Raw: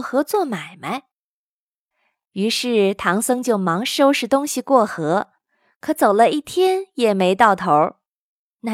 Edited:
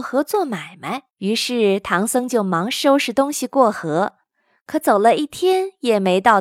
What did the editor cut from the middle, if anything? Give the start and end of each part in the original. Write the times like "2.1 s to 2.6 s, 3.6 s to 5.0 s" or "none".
1.1 s to 2.2 s